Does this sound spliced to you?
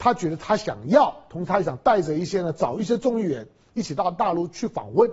no; 0 cuts

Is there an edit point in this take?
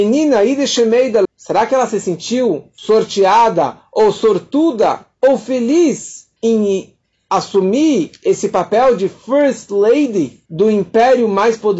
yes; 2 cuts; at 1.2 s, 10.5 s

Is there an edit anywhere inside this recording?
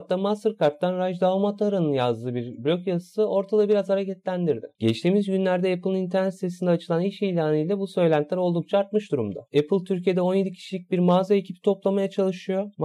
yes; 1 cut; at 4.8 s

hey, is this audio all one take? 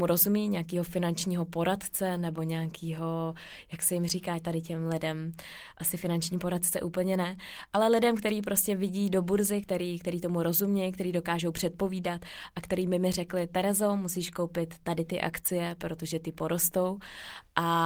yes; 0 cuts

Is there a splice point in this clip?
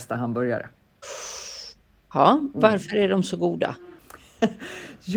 yes; 1 cut; at 4.0 s

